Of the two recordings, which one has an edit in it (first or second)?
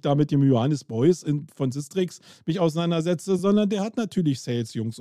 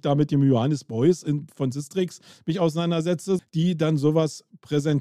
second